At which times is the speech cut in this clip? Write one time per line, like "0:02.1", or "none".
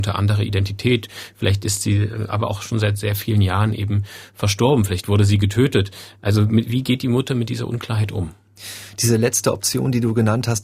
none